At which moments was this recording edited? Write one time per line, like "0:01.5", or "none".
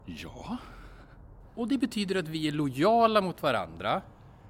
0:01.4